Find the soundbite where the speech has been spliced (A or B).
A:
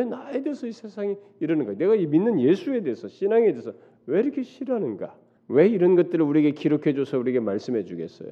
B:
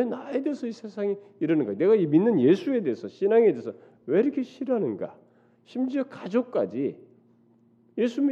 A